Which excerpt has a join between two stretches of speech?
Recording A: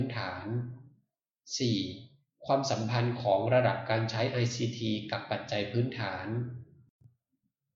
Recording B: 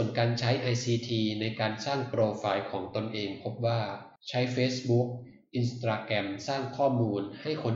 B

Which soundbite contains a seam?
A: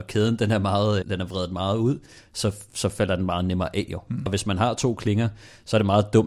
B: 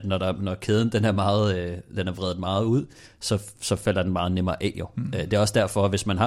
A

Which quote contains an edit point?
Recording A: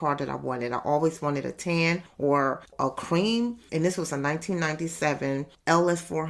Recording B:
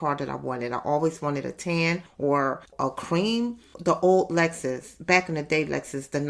A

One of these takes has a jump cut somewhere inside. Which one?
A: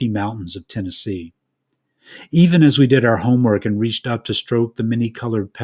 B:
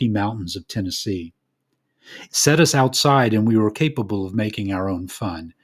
B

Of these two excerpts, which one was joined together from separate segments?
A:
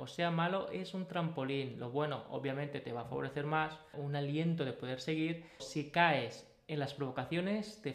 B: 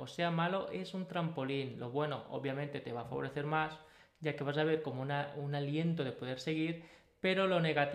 A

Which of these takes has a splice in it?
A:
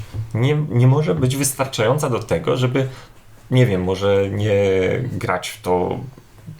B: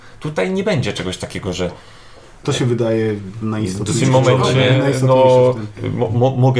B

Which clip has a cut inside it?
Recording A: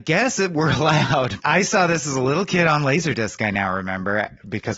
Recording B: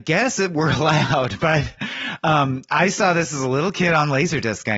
A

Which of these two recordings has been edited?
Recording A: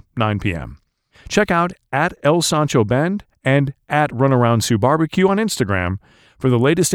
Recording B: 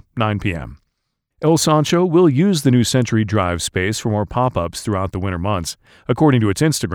A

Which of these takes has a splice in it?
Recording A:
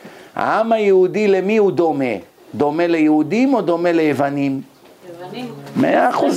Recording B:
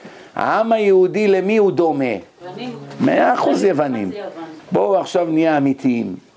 B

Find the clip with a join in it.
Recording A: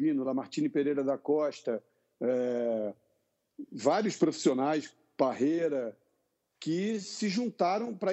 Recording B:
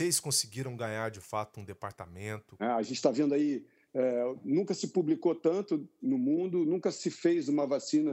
B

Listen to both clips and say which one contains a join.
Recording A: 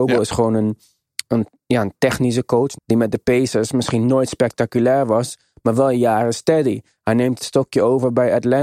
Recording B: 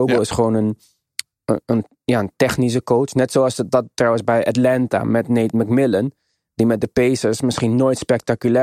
A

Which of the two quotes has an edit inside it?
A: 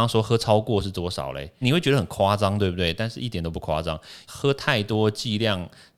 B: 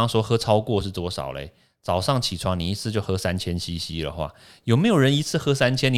A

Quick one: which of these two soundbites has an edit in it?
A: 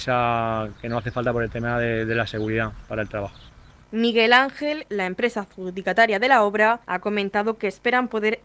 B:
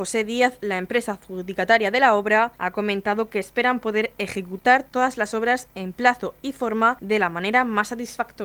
A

